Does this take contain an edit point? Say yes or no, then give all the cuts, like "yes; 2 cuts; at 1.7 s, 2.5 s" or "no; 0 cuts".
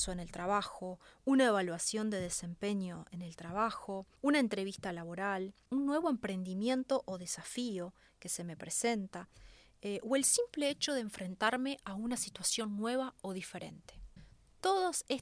no; 0 cuts